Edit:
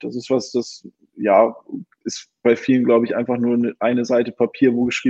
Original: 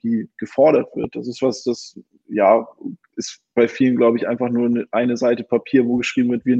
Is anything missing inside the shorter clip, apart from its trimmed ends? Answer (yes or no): no